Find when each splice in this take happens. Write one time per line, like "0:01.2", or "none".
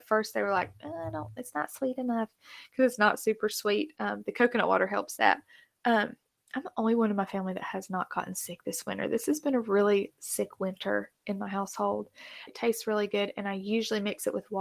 0:12.5